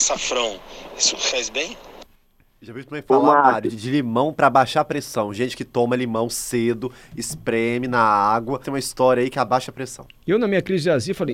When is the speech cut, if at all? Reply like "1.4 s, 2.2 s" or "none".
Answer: 1.3 s, 8.6 s